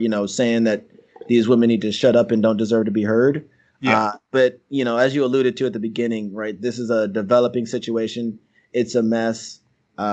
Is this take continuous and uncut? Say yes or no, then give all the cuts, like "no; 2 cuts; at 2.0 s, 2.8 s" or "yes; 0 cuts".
yes; 0 cuts